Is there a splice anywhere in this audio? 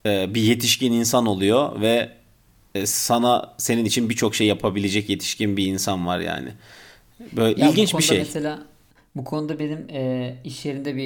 no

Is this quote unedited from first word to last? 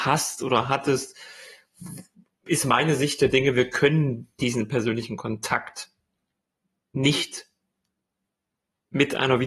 yes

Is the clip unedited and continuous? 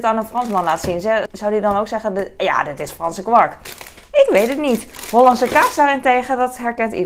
no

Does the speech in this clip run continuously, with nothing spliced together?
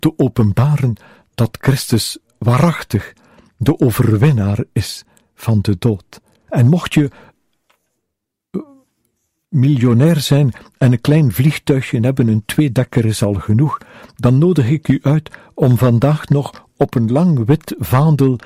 no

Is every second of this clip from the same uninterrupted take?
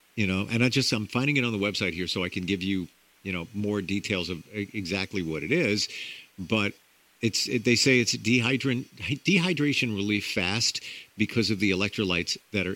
yes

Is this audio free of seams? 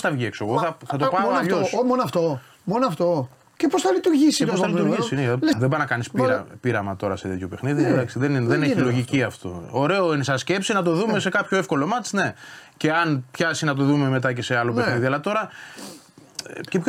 no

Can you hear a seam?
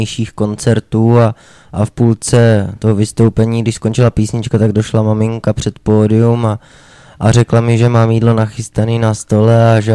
no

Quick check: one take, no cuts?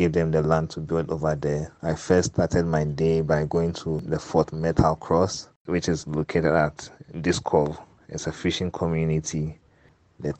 no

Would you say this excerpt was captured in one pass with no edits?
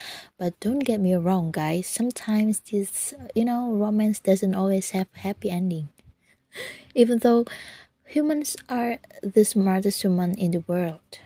yes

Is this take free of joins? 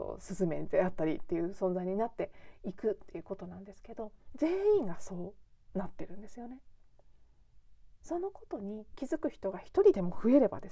no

